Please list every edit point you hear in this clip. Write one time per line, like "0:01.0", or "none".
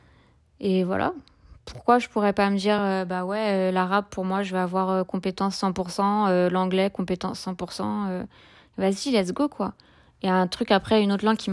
none